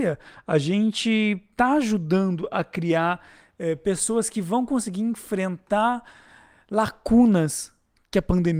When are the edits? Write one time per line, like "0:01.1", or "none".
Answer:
none